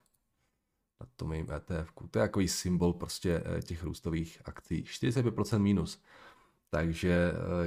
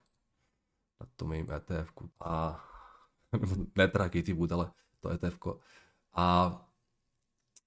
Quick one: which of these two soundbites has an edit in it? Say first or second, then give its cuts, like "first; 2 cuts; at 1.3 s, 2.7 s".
second; 1 cut; at 2.1 s